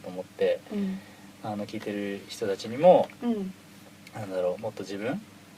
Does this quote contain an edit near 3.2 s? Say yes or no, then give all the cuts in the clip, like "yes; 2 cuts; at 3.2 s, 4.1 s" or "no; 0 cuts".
no; 0 cuts